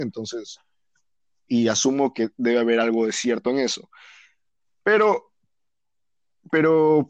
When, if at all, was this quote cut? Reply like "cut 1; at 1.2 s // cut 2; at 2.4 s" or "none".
cut 1; at 1.5 s